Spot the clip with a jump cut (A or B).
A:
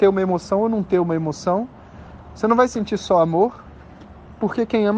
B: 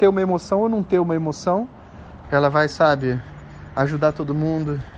B